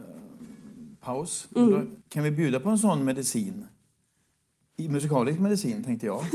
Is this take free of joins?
no; 1 cut; at 2.0 s

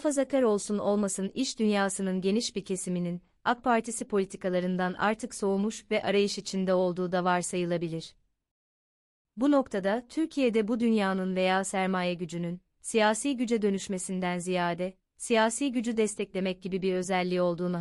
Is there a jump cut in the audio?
no; 0 cuts

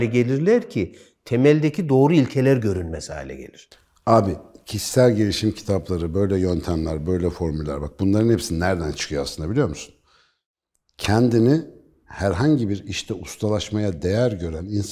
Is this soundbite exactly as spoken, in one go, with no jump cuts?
yes; 0 cuts

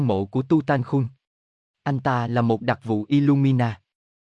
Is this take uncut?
no; 1 cut; at 1.7 s

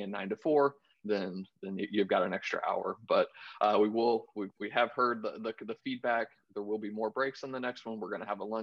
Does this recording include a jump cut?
no; 0 cuts

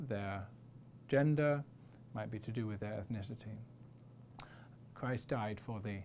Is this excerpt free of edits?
no; 1 cut; at 4.9 s

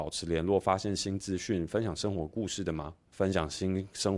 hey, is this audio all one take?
no; 1 cut; at 3.1 s

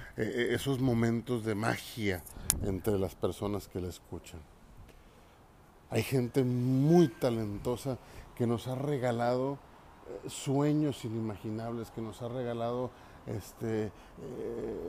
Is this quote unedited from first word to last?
yes; 0 cuts

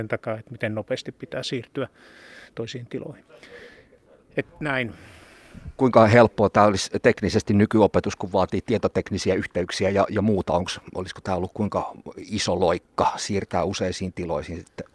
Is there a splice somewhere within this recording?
no; 0 cuts

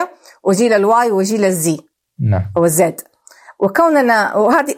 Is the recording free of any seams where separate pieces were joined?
yes; 0 cuts

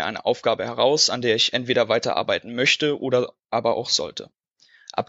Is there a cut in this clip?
no; 0 cuts

